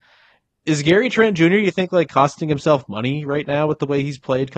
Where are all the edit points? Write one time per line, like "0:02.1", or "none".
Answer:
none